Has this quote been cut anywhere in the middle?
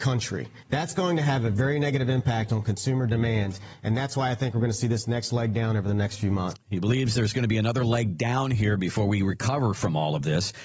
no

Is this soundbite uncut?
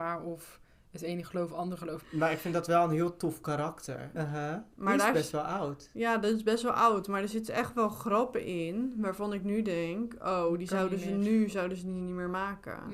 no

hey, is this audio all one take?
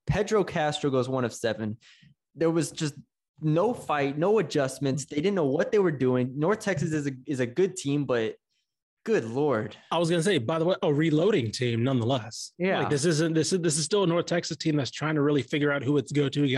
yes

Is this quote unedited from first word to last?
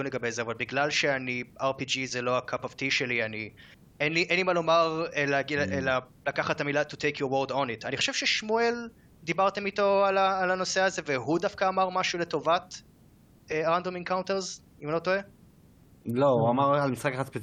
no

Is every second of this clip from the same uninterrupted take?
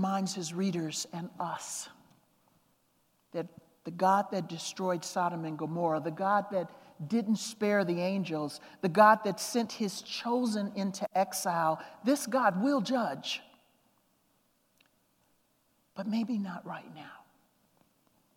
yes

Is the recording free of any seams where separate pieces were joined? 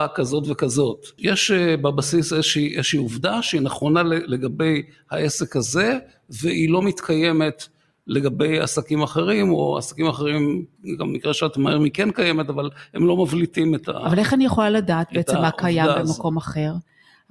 yes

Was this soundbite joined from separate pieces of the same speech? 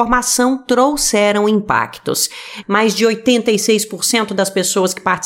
yes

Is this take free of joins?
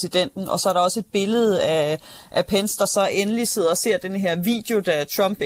yes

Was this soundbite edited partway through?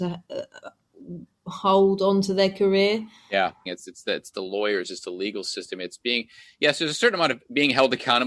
yes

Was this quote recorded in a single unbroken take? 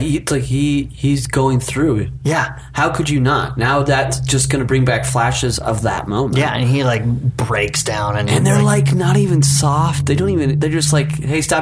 yes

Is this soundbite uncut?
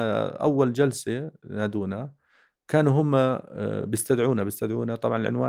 yes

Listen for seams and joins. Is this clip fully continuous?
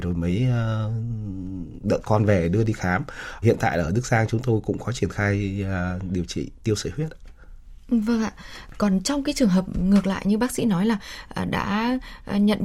no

